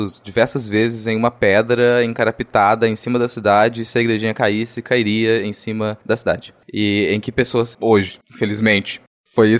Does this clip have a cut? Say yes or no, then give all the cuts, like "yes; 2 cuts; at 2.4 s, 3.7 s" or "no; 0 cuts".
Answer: yes; 1 cut; at 7.7 s